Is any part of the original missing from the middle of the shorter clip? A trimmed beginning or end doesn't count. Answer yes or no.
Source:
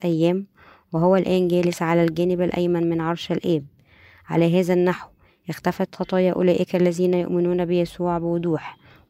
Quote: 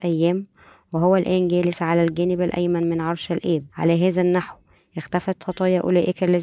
yes